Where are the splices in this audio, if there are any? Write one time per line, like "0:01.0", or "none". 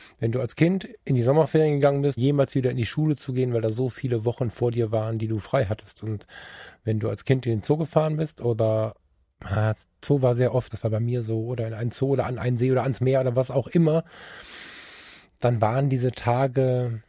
0:02.2
0:10.7